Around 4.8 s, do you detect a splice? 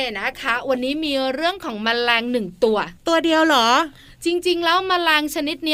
no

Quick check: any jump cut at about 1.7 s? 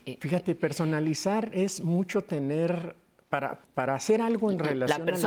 no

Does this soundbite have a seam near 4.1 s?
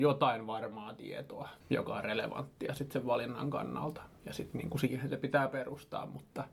no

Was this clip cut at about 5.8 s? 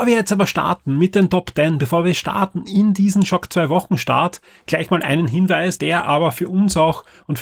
yes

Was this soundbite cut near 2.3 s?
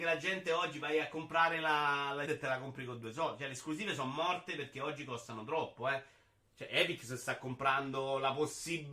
yes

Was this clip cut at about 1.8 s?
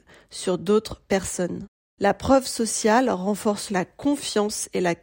no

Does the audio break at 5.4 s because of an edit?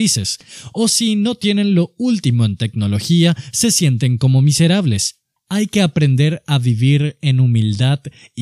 yes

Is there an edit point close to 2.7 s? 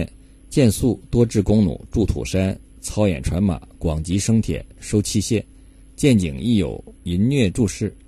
no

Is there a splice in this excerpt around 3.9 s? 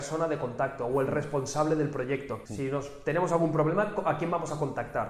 no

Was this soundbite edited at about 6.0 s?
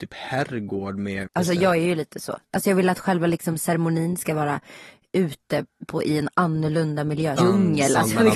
no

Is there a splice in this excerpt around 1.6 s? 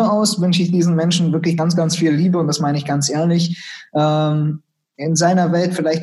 no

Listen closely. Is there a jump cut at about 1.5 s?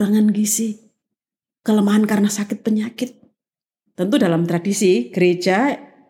no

